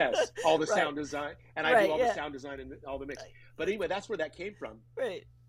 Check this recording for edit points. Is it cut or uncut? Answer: uncut